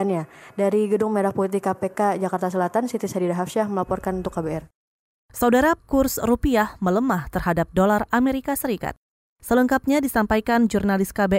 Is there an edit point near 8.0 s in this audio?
no; 2 cuts; at 5.8 s, 9.3 s

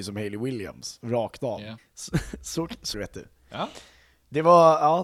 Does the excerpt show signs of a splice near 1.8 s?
yes; 2 cuts; at 1.8 s, 2.9 s

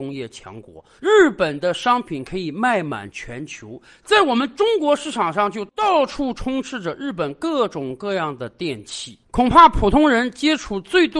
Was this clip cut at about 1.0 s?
yes; 2 cuts; at 1.0 s, 9.2 s

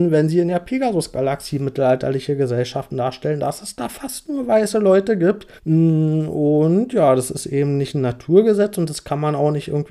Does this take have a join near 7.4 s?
no; 1 cut; at 5.6 s

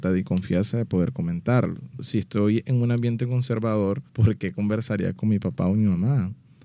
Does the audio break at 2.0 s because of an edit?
yes; 2 cuts; at 2.0 s, 4.1 s

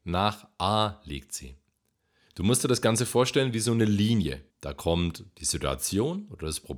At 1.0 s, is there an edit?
no; 2 cuts; at 2.3 s, 4.5 s

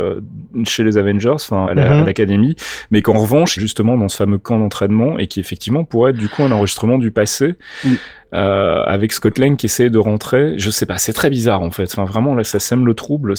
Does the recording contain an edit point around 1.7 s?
yes; 2 cuts; at 1.7 s, 3.6 s

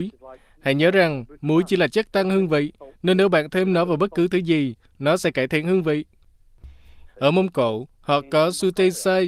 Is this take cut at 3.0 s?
no; 1 cut; at 7.1 s

